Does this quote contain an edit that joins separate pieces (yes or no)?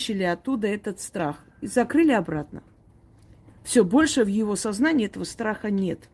no